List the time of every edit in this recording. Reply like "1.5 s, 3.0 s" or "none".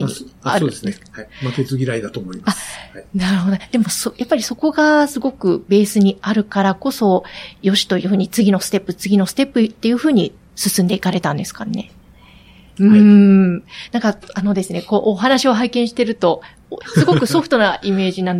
12.8 s, 16.8 s